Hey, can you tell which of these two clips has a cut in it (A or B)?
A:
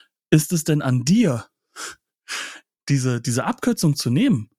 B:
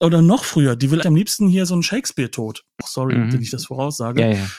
B